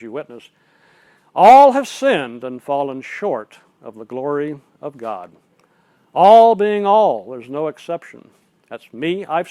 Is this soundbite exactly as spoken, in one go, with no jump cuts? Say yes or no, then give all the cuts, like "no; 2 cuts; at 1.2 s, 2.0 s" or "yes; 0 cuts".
yes; 0 cuts